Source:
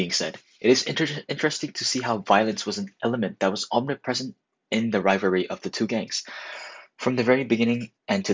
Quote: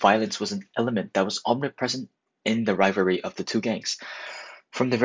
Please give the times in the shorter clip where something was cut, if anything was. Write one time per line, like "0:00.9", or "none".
none